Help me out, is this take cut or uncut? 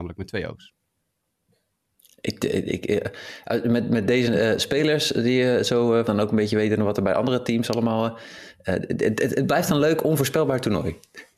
cut